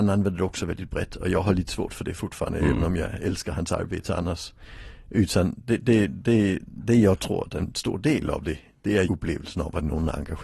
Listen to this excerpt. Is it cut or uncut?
cut